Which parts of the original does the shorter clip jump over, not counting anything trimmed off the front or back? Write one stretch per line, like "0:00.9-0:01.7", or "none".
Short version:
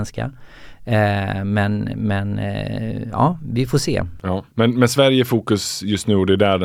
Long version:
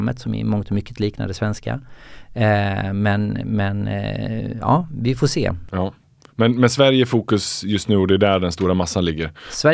0:06.0-0:06.3